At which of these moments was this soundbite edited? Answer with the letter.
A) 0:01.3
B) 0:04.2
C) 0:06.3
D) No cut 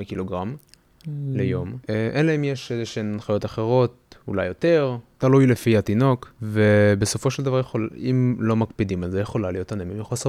D